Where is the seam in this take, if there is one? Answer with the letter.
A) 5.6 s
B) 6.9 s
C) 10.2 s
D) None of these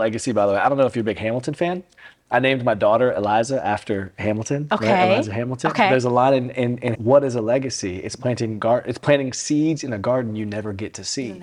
B